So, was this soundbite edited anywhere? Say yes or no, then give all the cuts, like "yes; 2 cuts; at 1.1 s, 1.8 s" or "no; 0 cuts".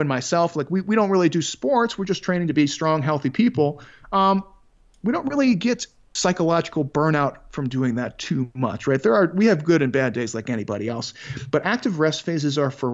no; 0 cuts